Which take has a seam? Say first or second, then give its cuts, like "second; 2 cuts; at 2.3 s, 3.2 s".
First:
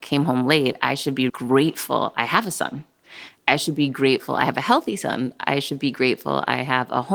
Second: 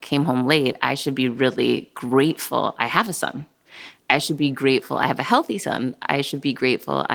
first; 1 cut; at 1.3 s